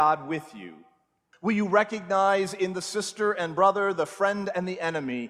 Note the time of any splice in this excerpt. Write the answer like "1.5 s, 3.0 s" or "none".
1.3 s